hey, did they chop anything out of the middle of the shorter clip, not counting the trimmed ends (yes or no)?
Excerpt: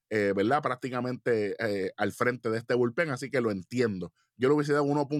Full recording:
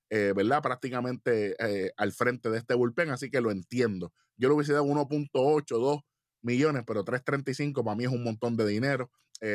no